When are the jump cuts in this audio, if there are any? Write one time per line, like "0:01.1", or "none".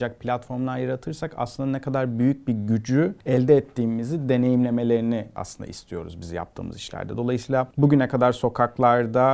none

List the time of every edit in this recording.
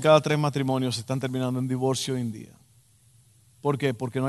none

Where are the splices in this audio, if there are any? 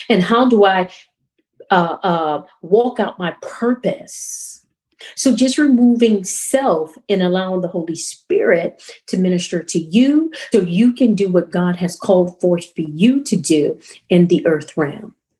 0:05.1
0:10.5

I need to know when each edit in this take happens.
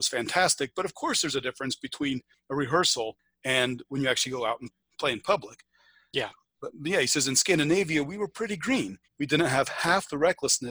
0:09.0

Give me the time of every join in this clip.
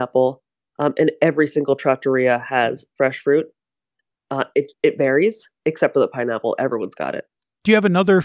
none

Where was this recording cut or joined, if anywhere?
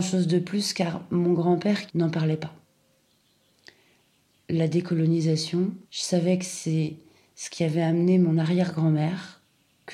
0:01.9
0:05.8

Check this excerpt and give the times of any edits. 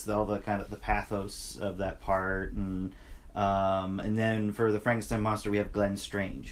none

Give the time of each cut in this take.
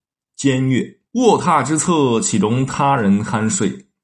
0:01.1

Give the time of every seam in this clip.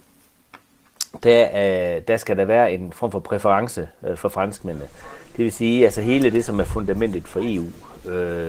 none

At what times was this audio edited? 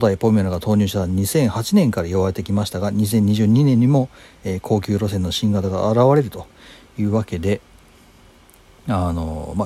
none

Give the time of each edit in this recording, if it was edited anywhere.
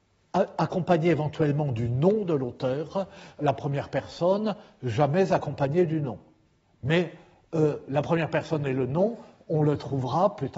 0:03.4

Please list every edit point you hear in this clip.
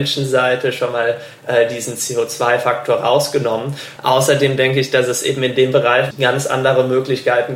0:04.0
0:06.1

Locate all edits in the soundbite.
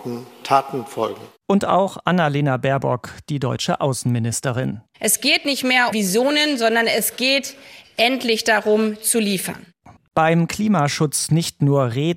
0:05.9
0:10.0

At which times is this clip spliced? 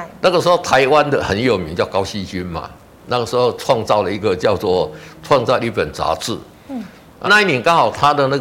0:07.2

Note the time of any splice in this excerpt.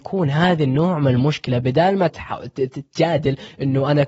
0:02.1

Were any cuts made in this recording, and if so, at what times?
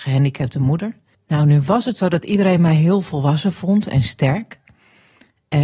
0:01.1

